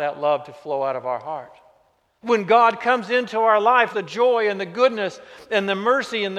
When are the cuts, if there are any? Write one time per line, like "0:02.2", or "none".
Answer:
0:02.2
0:03.9